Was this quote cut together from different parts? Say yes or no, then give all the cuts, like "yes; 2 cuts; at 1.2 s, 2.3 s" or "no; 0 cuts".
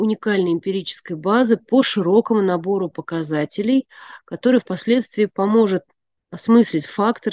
no; 0 cuts